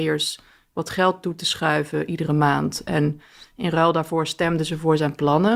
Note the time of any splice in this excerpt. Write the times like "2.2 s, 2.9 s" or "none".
none